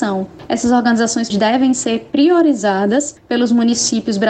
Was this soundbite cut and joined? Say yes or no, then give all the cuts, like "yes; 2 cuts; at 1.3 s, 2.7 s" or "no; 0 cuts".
yes; 1 cut; at 1.3 s